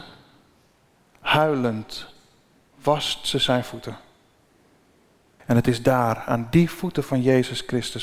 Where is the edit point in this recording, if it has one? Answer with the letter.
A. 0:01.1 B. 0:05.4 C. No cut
B